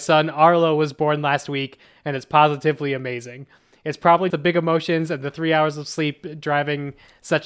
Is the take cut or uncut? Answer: cut